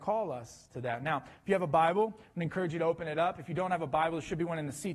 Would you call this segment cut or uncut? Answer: uncut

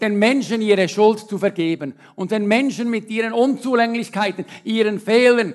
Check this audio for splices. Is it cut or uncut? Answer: uncut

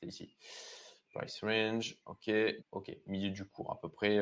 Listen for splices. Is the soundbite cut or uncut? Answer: cut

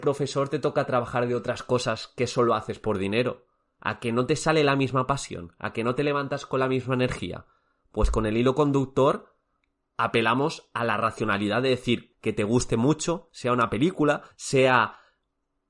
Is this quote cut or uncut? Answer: cut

